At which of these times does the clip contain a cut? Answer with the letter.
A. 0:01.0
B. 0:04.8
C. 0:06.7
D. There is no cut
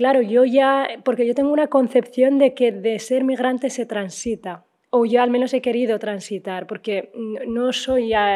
D